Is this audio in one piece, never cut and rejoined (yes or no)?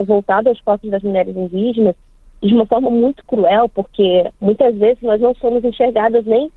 yes